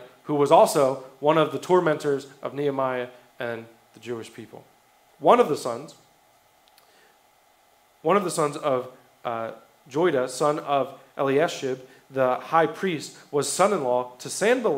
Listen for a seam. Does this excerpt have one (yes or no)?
yes